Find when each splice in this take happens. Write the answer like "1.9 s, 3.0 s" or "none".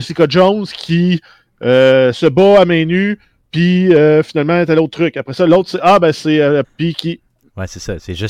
6.6 s